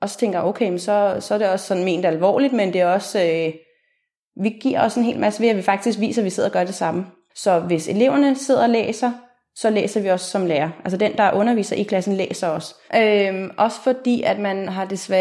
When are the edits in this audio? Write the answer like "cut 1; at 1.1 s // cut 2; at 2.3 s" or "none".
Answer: cut 1; at 7.3 s // cut 2; at 12.9 s